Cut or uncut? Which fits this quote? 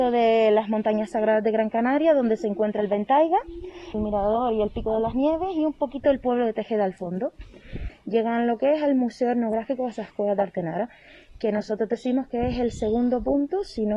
cut